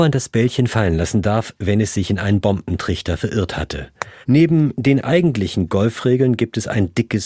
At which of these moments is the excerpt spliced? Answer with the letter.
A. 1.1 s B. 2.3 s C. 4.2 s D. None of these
C